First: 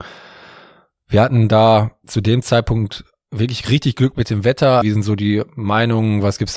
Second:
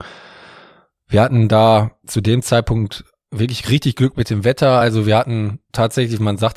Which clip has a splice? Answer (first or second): first